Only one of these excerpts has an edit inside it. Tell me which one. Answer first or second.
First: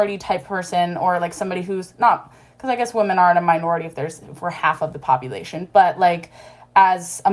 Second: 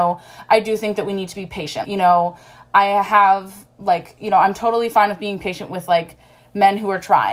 second